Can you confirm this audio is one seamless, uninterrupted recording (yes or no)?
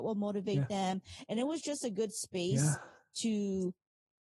yes